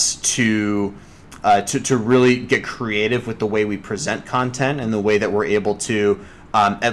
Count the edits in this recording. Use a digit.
0